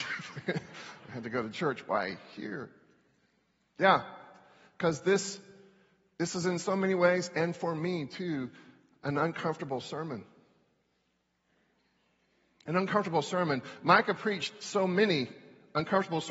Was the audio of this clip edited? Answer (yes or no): no